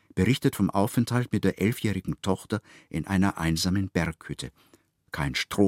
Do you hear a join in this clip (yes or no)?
no